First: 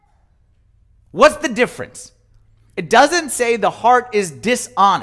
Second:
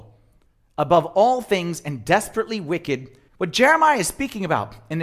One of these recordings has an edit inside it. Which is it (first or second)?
second